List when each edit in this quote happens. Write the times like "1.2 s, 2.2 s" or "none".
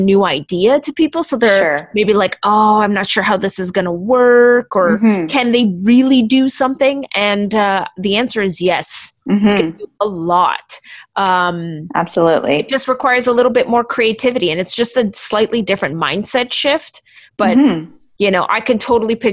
none